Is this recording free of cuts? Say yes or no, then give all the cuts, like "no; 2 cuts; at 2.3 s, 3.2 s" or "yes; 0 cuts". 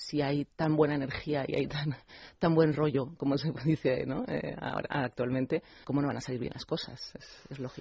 no; 1 cut; at 5.8 s